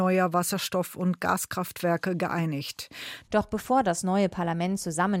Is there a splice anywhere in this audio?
yes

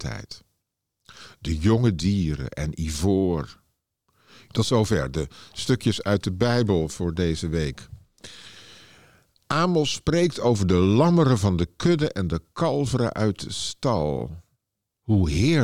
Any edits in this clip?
yes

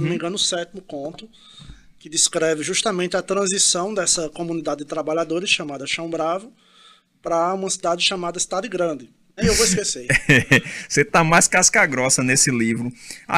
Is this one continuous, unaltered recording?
no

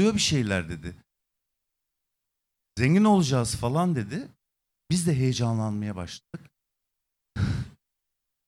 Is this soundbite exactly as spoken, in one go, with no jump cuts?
yes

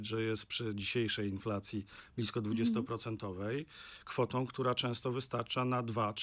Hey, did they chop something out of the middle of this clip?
no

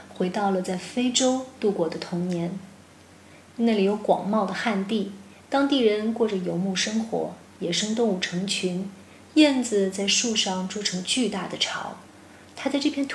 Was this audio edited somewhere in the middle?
no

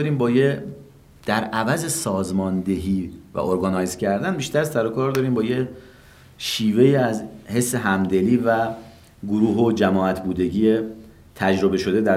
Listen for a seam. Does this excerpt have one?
no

